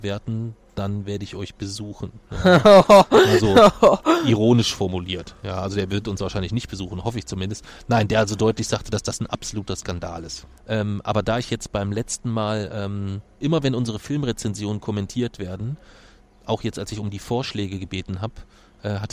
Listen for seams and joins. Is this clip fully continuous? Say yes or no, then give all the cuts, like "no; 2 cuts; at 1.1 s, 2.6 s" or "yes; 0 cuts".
no; 2 cuts; at 10.6 s, 13.4 s